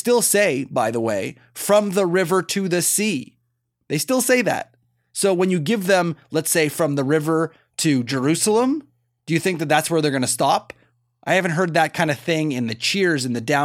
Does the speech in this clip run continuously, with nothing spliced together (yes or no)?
yes